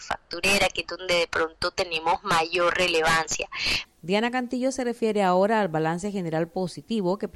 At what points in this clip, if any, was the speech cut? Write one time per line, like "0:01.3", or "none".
0:03.8